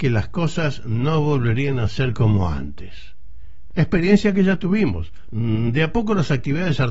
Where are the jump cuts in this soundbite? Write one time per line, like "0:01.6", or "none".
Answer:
0:03.7
0:05.3